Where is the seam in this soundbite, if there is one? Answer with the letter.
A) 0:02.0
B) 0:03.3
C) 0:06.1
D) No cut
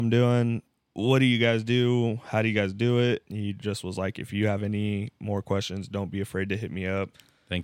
B